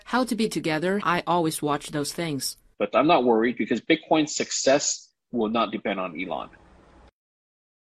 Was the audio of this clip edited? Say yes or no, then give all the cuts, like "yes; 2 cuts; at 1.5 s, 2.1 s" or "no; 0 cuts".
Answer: yes; 2 cuts; at 1.0 s, 2.7 s